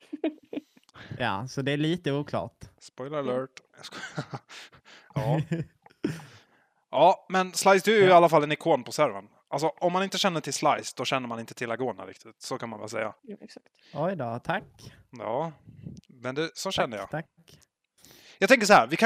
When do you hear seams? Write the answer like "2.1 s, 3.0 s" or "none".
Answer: 13.2 s